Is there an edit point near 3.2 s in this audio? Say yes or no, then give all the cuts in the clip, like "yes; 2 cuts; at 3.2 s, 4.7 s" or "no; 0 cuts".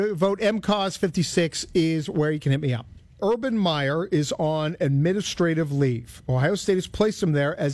yes; 1 cut; at 3.2 s